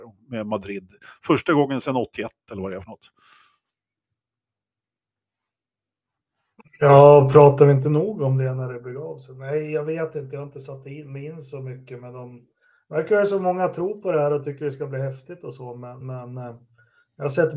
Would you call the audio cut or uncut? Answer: uncut